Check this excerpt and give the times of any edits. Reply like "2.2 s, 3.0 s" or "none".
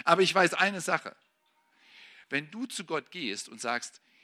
none